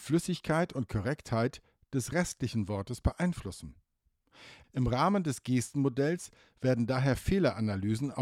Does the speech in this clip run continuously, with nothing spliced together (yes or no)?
no